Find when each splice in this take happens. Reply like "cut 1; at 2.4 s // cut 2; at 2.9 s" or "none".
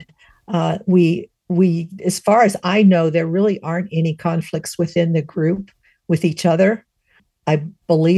none

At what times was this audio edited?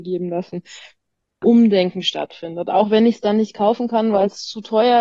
cut 1; at 1.4 s

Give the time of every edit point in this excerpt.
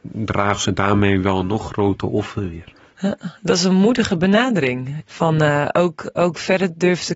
cut 1; at 5.0 s

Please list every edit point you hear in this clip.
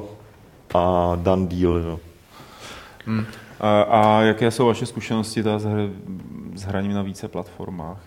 none

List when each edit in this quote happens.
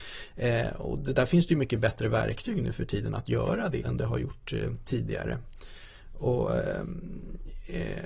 cut 1; at 3.8 s

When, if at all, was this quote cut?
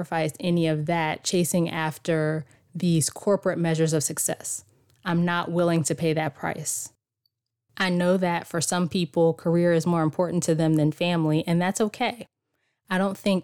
none

